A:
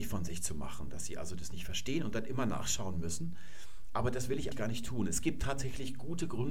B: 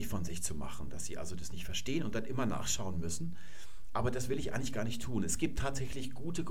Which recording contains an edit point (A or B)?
A